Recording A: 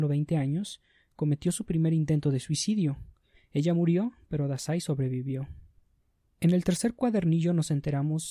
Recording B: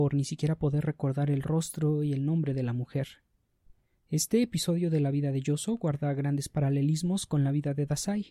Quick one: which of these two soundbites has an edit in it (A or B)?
A